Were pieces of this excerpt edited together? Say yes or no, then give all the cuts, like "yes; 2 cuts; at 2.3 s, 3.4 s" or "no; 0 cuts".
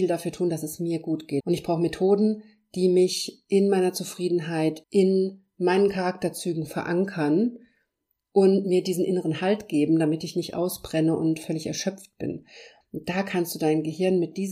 yes; 3 cuts; at 1.4 s, 4.8 s, 12.8 s